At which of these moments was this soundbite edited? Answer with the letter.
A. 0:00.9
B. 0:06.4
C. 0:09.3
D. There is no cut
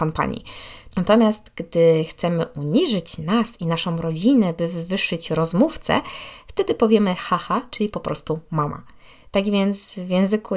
A